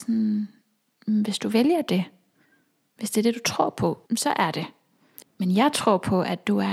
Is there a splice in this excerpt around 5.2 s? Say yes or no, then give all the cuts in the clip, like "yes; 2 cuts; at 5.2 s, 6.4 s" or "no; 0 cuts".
yes; 2 cuts; at 4.1 s, 5.2 s